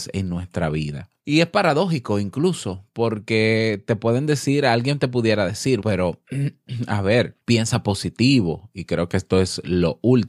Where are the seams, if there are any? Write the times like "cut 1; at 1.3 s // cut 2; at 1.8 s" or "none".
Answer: cut 1; at 1.2 s // cut 2; at 5.8 s // cut 3; at 7.4 s